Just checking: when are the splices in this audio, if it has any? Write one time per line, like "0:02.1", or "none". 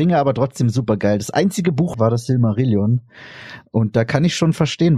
0:01.9

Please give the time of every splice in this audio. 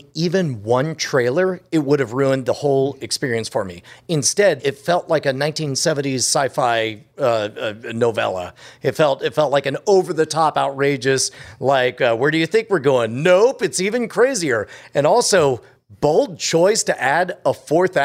0:04.6

